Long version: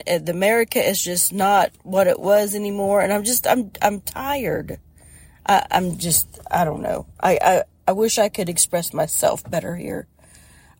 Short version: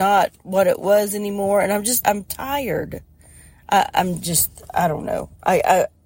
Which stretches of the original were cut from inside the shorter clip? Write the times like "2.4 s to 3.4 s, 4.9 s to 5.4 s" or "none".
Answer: 3.4 s to 3.8 s